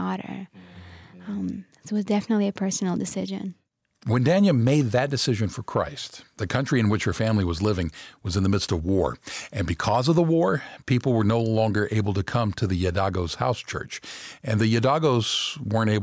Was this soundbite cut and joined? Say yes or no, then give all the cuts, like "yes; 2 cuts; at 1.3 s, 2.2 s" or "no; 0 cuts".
no; 0 cuts